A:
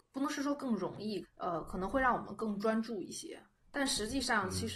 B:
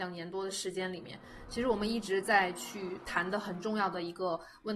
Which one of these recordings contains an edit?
A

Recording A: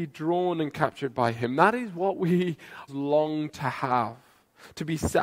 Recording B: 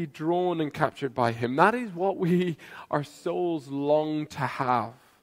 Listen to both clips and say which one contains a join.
A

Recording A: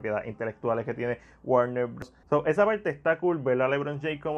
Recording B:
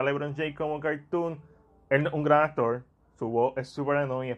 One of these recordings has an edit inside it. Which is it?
A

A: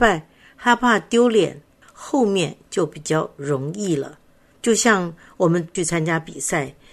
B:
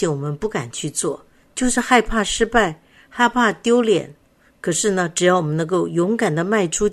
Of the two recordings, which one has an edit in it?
A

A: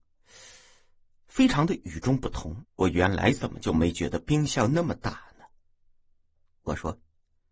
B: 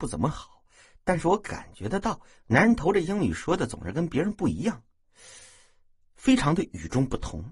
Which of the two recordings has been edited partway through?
A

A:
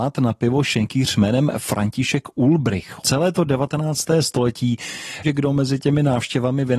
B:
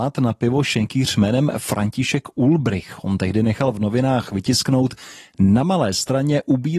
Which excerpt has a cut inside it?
A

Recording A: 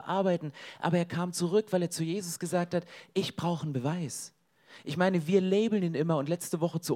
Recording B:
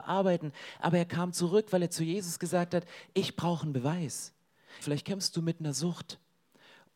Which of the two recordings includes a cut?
B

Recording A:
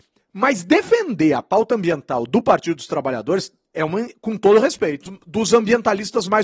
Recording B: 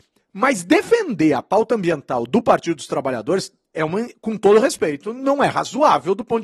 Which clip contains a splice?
A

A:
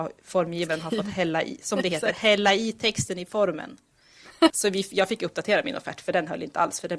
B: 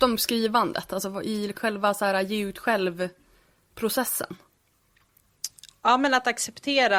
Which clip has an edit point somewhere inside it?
A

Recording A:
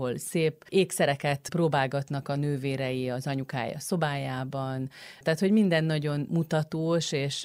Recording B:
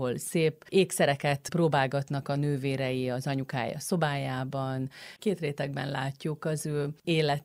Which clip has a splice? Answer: B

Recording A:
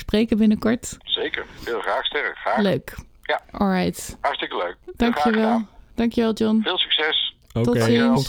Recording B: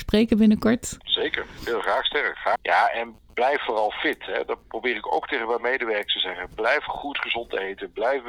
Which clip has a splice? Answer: B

